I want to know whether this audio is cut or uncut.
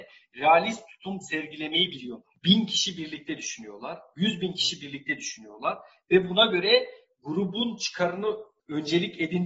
cut